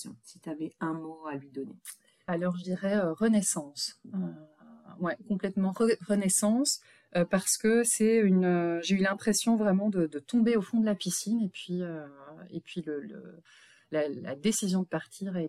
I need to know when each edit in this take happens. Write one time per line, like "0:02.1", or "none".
none